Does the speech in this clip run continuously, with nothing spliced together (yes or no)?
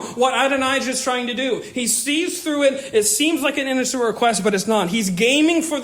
yes